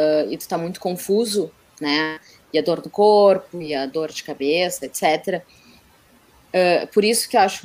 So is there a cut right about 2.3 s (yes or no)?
no